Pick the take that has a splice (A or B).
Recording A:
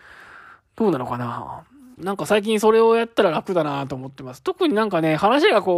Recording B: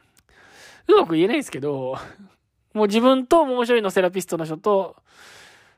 A